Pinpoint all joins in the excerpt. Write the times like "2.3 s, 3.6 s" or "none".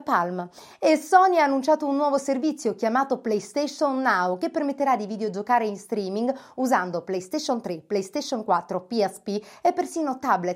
none